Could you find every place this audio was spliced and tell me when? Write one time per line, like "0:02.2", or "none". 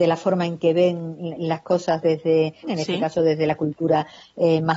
0:01.4
0:02.6